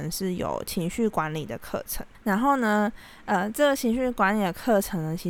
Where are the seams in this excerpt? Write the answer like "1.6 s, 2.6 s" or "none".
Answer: none